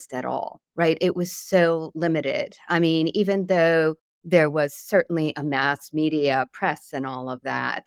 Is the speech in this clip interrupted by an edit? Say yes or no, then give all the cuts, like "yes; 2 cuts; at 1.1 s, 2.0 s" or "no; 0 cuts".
no; 0 cuts